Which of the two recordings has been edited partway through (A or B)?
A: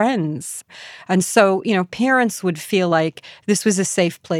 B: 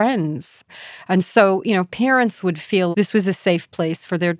B